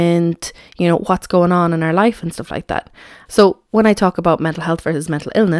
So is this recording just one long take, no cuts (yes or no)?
no